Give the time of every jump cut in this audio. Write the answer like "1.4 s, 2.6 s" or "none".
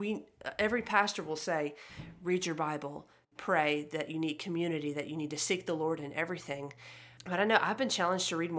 7.2 s